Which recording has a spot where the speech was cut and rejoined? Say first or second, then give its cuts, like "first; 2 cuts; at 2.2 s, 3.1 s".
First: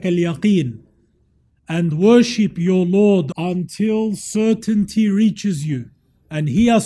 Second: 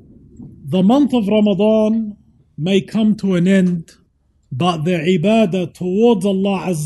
first; 1 cut; at 3.3 s